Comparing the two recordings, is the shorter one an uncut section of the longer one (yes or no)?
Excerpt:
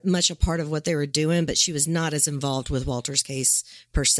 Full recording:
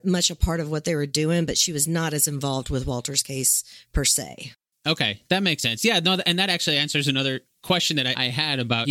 yes